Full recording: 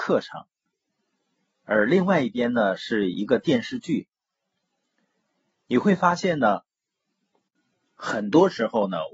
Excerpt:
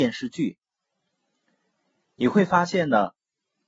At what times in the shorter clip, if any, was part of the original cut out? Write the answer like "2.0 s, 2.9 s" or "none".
none